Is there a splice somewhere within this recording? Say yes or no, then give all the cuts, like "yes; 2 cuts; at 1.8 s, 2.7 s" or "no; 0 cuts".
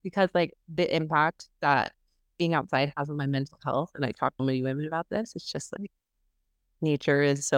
yes; 1 cut; at 4.4 s